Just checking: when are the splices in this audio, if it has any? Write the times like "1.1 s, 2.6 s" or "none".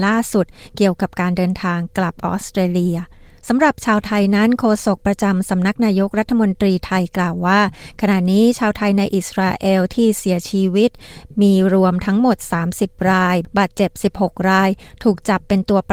none